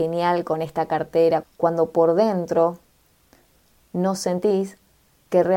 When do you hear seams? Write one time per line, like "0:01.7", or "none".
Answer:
0:01.4